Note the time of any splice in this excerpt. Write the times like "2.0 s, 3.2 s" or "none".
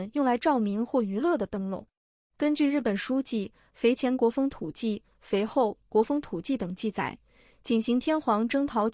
2.2 s